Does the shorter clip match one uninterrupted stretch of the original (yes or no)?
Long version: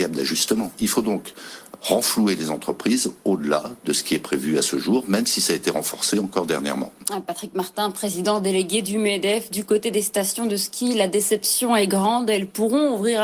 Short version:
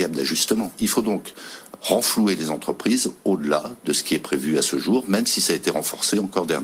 yes